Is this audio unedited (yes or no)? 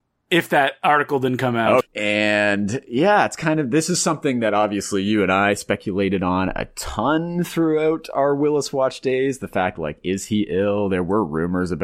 no